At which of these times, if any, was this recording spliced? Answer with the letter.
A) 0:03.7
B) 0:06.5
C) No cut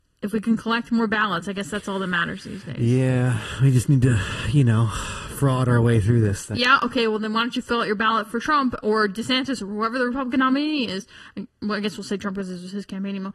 B